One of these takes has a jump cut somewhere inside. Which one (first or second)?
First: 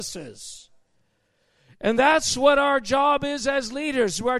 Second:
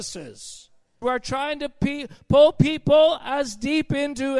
second